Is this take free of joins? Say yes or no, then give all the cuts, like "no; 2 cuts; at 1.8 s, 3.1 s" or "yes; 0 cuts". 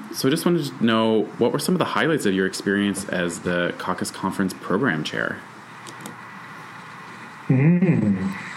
yes; 0 cuts